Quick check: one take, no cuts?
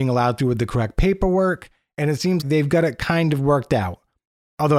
no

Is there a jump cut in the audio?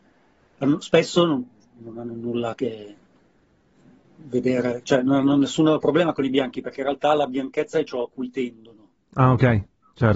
no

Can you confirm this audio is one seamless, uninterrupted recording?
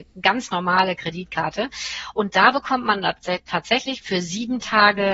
no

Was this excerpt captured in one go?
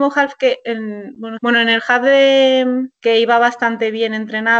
no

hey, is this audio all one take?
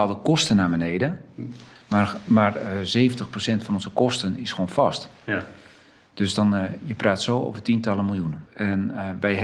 no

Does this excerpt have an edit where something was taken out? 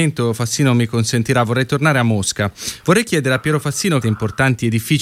yes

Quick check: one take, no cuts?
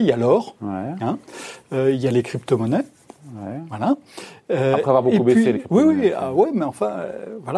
yes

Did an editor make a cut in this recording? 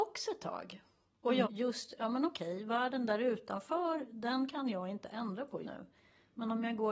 yes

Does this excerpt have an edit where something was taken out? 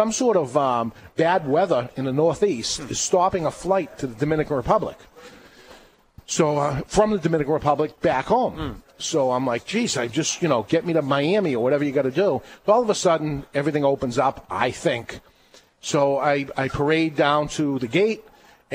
no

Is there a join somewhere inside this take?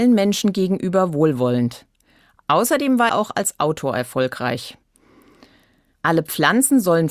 yes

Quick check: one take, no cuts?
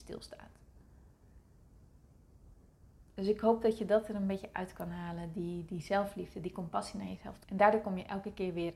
no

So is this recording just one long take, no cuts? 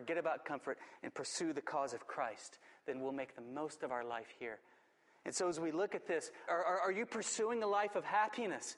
no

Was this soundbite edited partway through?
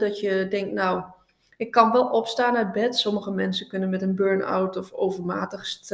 no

